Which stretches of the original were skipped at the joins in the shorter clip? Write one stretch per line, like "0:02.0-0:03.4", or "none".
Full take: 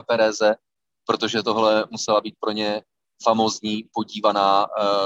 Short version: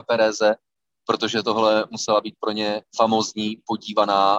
0:02.9-0:03.1